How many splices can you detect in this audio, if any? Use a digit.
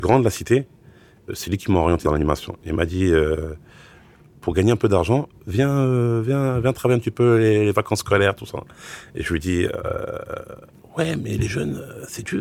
0